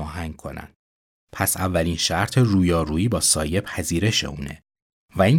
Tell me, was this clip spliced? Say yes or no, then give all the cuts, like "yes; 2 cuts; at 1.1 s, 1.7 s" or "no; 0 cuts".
no; 0 cuts